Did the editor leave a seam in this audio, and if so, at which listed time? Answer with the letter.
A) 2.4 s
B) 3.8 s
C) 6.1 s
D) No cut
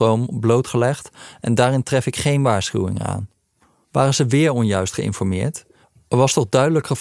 B